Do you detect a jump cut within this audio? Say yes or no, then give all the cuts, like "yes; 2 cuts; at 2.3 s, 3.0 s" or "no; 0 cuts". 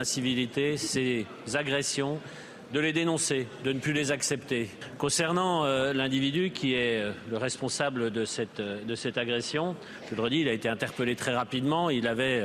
no; 0 cuts